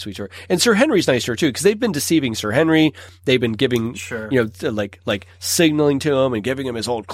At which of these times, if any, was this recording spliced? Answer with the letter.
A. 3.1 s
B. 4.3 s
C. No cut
C